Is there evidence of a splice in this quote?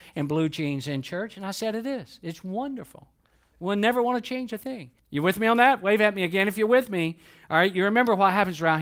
yes; 1 cut; at 5.0 s

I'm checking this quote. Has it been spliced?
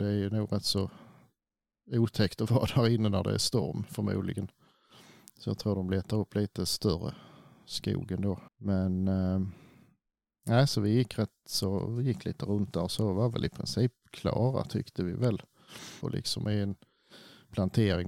yes; 2 cuts; at 8.5 s, 16.0 s

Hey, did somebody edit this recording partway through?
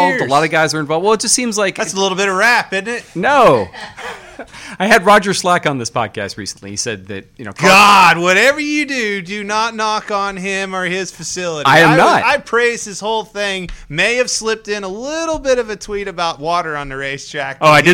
no; 0 cuts

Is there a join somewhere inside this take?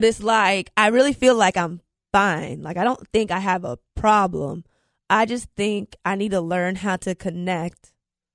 no; 0 cuts

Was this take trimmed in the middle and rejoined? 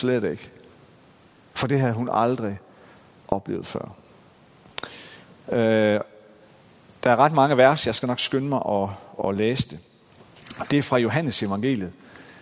no; 0 cuts

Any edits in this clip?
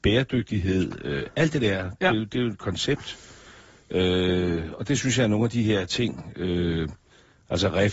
no; 0 cuts

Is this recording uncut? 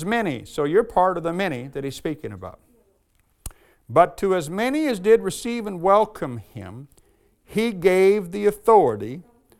yes; 0 cuts

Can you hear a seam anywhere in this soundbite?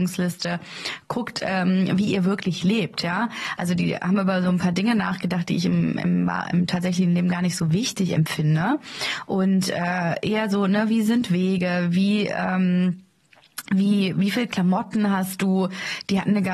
no; 0 cuts

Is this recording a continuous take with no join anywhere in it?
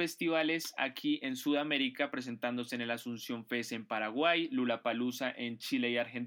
yes; 0 cuts

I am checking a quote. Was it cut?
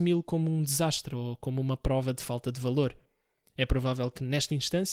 no; 0 cuts

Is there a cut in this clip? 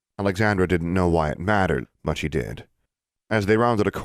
yes; 1 cut; at 1.8 s

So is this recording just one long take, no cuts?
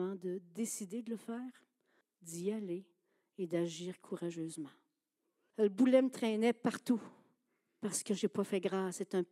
no; 2 cuts; at 2.0 s, 5.5 s

